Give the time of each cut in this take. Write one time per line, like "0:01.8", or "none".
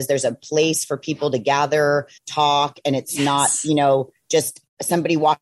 0:02.2